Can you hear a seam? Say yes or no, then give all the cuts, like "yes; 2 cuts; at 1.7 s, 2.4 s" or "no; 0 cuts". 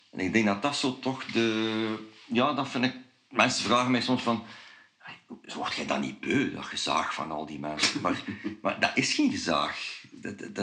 no; 0 cuts